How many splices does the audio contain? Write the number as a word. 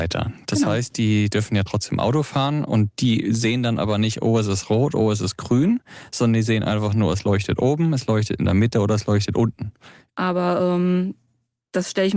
one